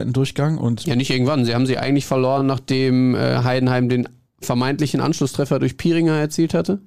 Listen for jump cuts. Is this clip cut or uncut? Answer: uncut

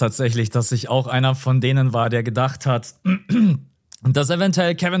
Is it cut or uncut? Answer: uncut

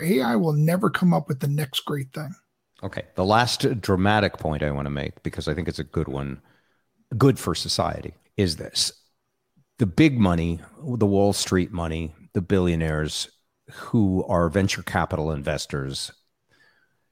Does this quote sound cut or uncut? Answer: cut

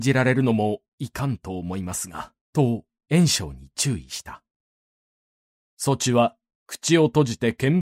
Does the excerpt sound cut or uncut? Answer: cut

